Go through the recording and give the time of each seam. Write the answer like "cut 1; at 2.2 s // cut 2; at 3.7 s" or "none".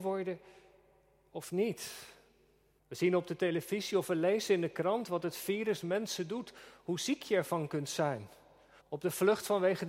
cut 1; at 2.8 s // cut 2; at 8.8 s

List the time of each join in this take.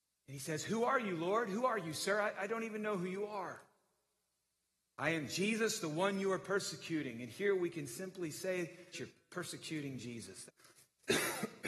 cut 1; at 8.9 s // cut 2; at 10.5 s

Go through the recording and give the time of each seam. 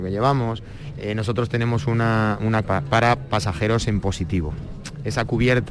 cut 1; at 0.9 s // cut 2; at 2.6 s

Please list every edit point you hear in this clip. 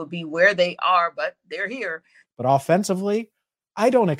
cut 1; at 2.2 s

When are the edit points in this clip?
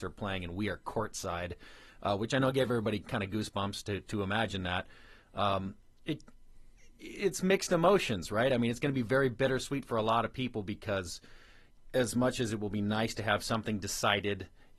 none

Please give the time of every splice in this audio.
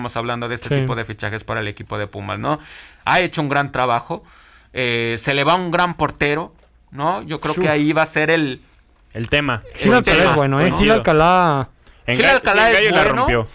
none

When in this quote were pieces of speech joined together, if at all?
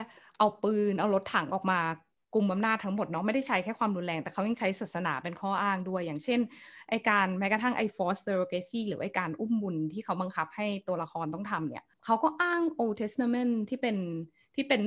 cut 1; at 11.9 s

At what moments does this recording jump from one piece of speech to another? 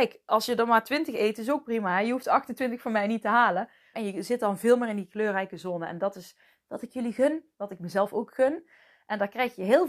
cut 1; at 3.9 s

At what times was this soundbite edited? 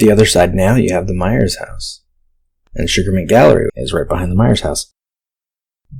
cut 1; at 3.7 s

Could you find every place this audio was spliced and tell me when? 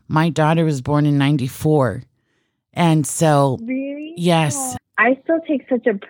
cut 1; at 4.8 s

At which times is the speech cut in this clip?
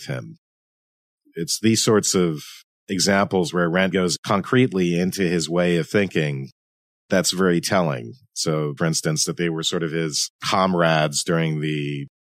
cut 1; at 3.9 s // cut 2; at 8.8 s

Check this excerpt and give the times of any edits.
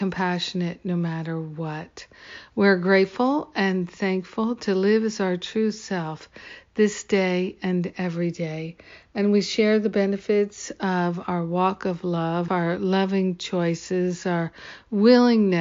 cut 1; at 12.5 s

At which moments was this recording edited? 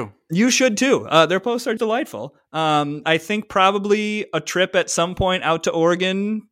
cut 1; at 1.8 s // cut 2; at 3.0 s

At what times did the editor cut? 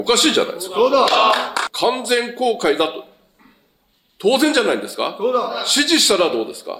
none

